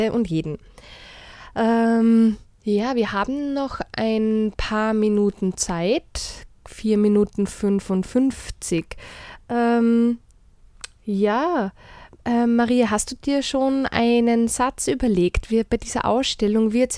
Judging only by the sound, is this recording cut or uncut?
uncut